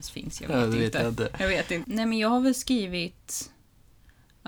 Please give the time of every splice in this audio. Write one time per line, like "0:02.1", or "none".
0:01.8